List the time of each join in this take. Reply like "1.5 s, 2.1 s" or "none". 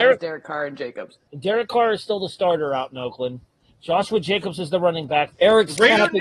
1.3 s, 5.3 s